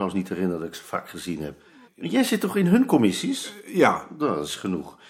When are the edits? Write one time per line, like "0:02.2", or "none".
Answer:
0:01.8